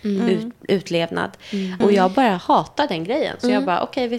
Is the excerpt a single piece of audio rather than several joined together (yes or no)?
no